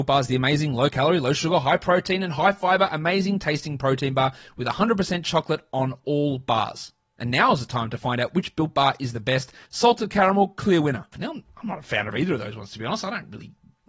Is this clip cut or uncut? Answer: cut